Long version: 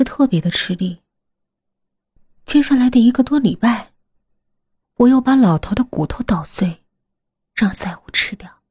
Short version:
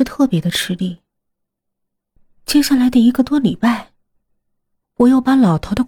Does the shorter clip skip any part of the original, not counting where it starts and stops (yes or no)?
no